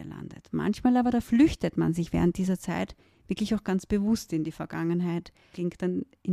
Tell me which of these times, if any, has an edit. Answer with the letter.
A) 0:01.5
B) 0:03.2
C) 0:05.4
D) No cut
D